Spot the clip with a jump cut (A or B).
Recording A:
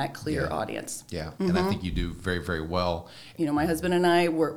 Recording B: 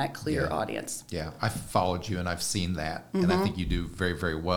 A